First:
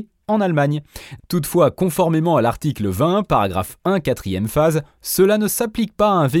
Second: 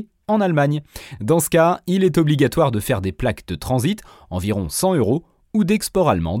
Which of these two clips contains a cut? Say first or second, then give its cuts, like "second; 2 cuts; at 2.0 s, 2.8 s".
first; 1 cut; at 1.2 s